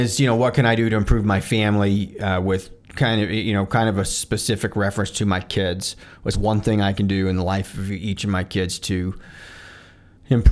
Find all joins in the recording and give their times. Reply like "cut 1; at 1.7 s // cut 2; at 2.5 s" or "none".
cut 1; at 6.3 s

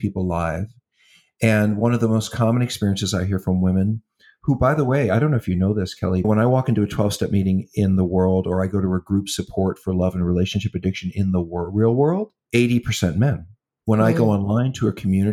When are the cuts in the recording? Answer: cut 1; at 6.2 s

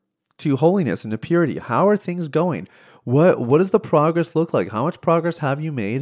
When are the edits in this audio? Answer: none

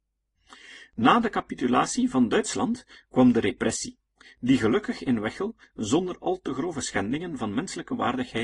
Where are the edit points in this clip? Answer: none

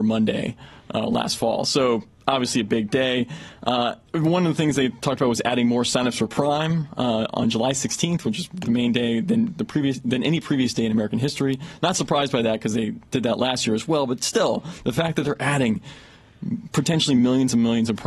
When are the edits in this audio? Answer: cut 1; at 4.1 s

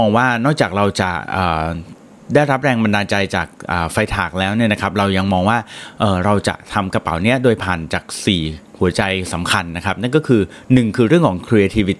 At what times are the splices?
none

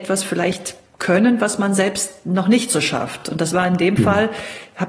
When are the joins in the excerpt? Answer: none

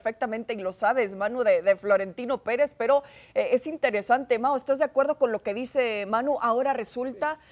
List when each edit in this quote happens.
none

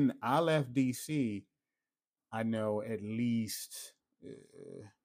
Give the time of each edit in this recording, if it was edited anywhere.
cut 1; at 2.1 s

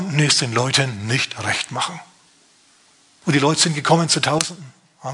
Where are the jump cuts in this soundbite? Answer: cut 1; at 3.2 s

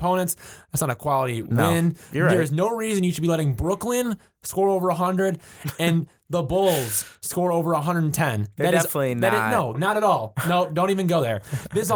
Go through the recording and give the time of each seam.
cut 1; at 9.7 s

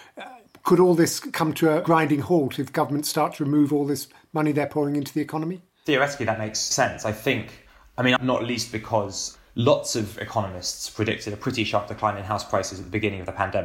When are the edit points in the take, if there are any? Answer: cut 1; at 8.2 s

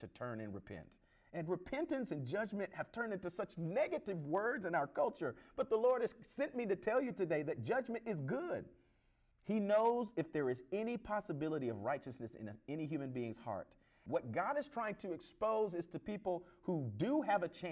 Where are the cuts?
cut 1; at 9.3 s // cut 2; at 14.1 s

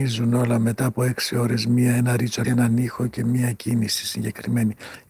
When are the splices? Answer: cut 1; at 2.4 s

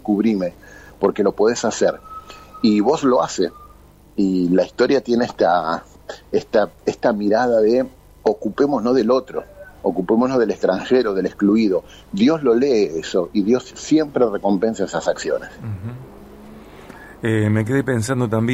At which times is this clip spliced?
none

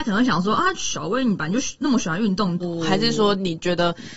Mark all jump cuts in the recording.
cut 1; at 2.6 s

